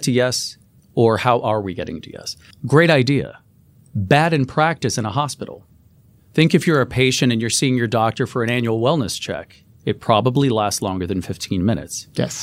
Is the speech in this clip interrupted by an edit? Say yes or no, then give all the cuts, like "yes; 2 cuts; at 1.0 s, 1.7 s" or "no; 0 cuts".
yes; 1 cut; at 2.5 s